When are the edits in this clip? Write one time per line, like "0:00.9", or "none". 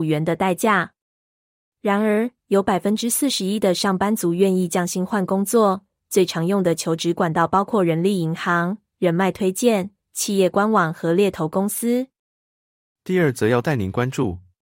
none